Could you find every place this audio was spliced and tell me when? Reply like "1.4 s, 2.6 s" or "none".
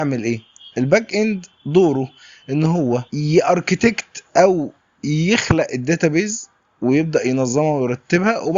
3.1 s

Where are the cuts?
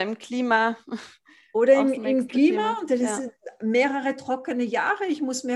none

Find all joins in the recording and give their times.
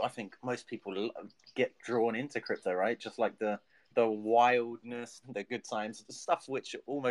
3.9 s, 5.2 s

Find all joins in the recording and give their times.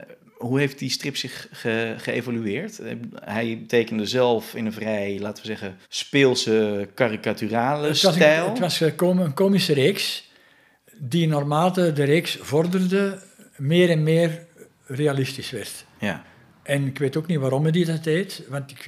5.8 s

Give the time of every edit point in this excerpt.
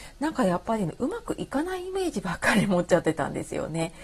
none

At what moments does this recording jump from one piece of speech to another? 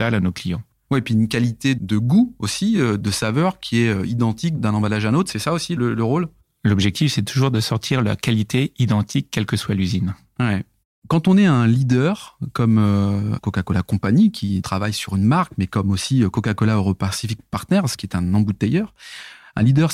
none

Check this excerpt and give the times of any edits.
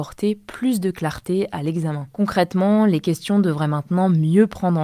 none

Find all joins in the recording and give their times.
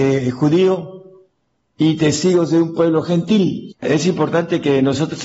3.7 s

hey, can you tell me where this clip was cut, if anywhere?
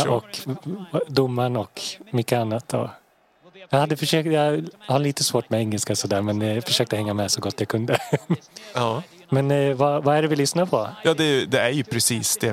none

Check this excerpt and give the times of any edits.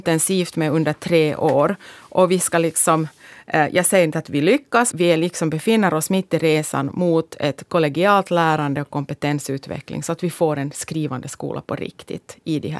4.9 s

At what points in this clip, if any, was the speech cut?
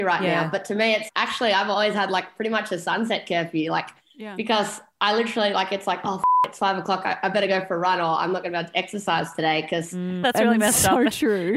1.1 s, 10.2 s

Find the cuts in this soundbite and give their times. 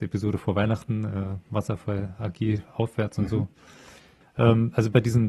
4.2 s

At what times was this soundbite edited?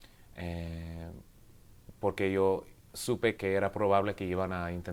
3.4 s

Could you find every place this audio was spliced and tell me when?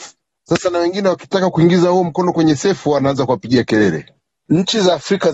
none

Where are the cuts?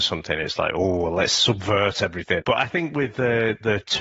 2.4 s

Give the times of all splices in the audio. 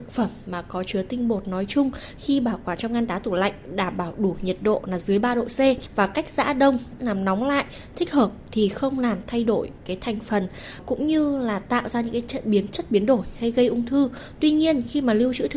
7.0 s

